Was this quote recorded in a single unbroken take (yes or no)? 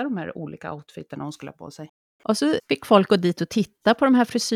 no